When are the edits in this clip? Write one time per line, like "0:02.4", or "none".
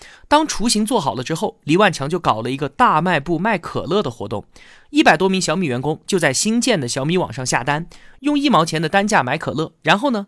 none